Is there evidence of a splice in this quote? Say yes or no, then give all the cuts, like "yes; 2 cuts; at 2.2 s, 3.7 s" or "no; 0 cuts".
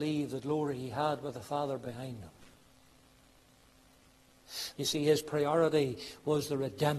yes; 1 cut; at 4.7 s